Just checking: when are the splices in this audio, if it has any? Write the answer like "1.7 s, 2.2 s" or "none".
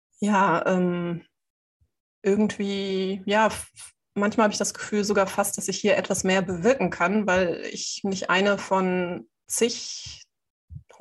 none